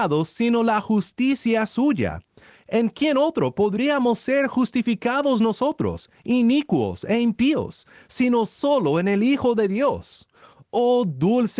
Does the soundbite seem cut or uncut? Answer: uncut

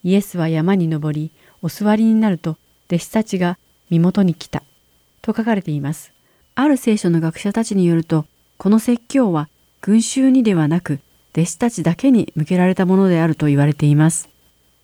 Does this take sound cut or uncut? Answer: cut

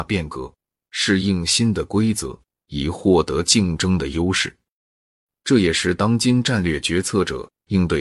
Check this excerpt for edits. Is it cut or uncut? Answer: uncut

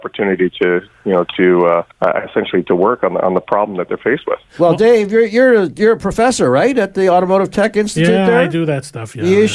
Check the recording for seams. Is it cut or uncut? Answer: cut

